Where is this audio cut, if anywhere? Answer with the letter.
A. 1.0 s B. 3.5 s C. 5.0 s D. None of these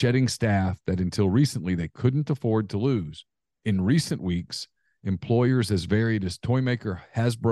B